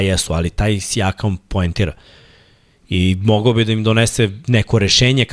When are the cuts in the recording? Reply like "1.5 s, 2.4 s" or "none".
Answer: none